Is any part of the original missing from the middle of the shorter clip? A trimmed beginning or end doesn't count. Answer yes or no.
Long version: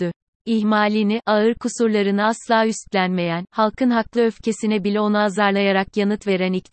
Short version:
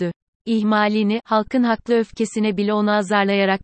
yes